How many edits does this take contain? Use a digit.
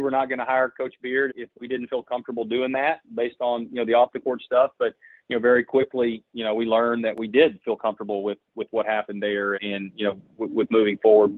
2